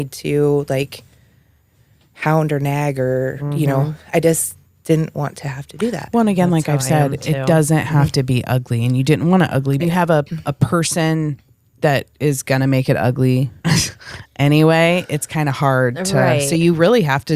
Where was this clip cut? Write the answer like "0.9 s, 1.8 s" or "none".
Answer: 9.8 s, 13.6 s